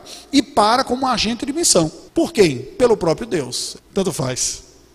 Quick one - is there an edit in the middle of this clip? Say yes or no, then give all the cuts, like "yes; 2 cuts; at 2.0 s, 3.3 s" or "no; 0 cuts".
yes; 2 cuts; at 2.1 s, 3.8 s